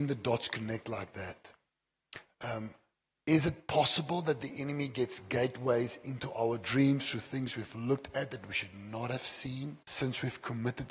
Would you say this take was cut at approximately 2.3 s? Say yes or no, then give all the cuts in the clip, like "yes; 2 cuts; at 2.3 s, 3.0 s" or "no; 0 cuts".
no; 1 cut; at 9.8 s